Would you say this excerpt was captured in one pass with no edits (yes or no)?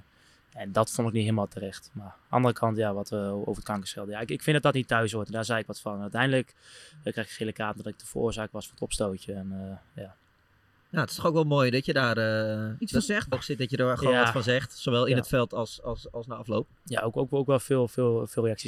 no